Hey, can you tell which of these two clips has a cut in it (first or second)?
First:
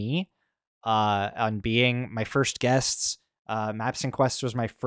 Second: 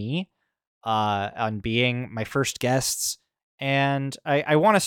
second